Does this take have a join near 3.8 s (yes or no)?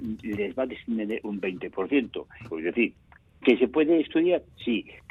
no